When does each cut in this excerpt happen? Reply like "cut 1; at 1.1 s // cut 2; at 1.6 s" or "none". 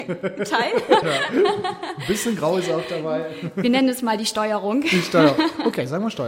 cut 1; at 1.0 s